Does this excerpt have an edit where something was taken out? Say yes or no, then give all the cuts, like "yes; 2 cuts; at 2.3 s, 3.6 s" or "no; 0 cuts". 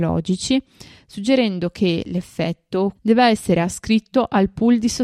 yes; 1 cut; at 3.0 s